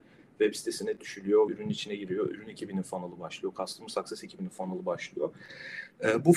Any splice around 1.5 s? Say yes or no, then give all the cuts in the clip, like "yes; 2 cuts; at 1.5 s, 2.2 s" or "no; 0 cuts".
yes; 1 cut; at 1.5 s